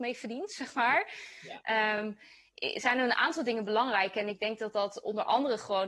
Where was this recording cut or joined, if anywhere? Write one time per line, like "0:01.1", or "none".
none